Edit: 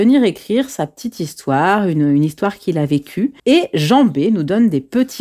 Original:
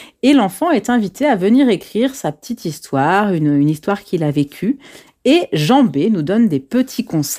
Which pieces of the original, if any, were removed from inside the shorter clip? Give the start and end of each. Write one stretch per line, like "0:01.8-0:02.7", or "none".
0:04.9-0:05.2